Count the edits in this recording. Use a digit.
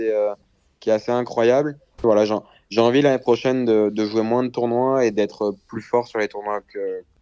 1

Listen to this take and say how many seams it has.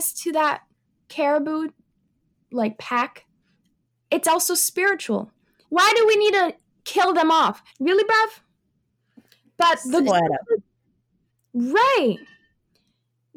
3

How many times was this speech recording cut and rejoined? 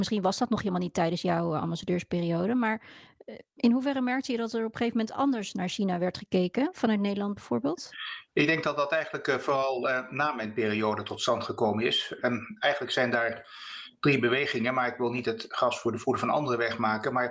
0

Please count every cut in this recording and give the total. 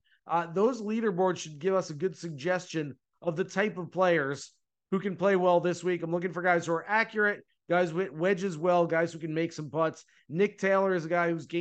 0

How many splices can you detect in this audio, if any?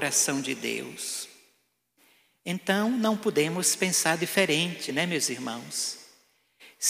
0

